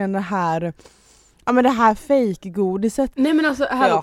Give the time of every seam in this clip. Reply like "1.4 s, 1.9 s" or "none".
3.1 s